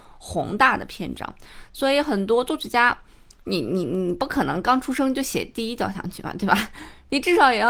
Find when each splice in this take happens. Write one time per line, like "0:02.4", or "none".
none